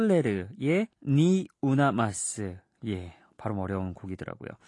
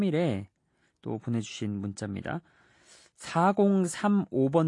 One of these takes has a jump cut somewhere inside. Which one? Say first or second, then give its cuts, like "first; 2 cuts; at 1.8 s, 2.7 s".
first; 1 cut; at 0.9 s